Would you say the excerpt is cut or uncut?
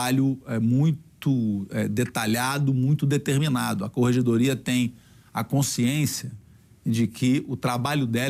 uncut